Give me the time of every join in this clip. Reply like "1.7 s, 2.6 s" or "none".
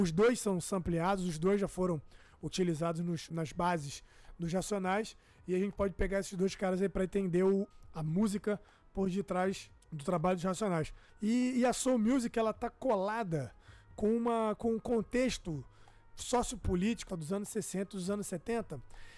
11.1 s, 17.1 s